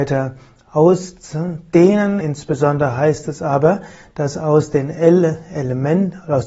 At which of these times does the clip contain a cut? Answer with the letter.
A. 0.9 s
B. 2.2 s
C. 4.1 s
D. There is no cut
D